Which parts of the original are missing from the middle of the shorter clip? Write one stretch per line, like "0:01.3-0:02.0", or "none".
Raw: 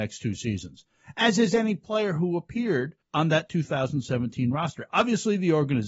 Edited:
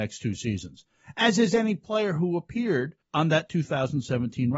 none